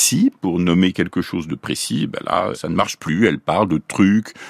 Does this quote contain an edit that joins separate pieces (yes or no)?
no